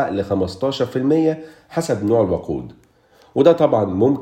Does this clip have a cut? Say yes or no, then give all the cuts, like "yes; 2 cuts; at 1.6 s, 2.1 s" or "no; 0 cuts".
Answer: no; 0 cuts